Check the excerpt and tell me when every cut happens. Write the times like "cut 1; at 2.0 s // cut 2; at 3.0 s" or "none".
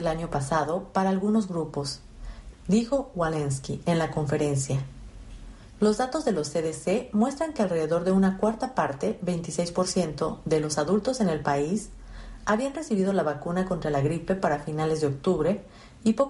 cut 1; at 2.5 s